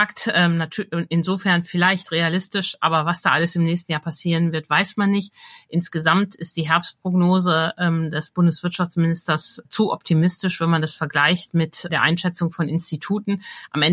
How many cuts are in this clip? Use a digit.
0